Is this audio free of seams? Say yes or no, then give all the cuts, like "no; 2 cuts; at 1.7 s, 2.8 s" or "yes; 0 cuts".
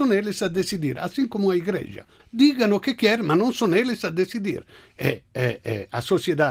no; 1 cut; at 2.2 s